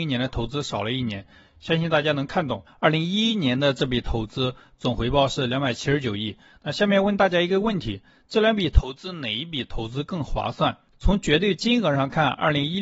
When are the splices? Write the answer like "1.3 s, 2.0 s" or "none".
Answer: 2.7 s, 10.9 s